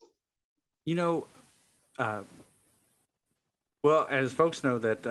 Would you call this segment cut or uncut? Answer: uncut